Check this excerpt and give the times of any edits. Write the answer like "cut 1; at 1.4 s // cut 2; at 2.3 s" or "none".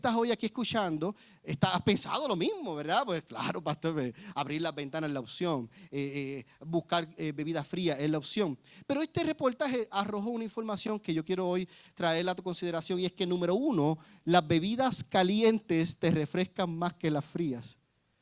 none